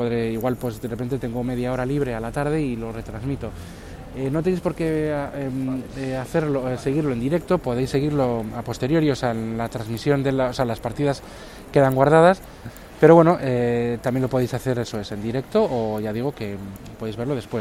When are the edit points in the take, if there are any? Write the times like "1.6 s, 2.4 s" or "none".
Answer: none